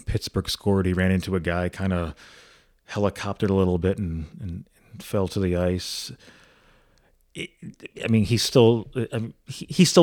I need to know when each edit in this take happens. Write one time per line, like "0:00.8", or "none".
0:08.0